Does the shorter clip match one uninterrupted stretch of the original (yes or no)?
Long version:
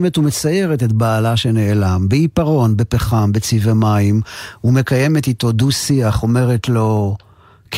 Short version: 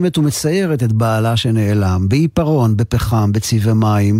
yes